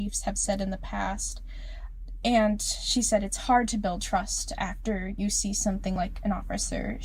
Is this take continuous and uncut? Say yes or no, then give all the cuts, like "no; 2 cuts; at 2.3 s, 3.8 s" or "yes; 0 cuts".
yes; 0 cuts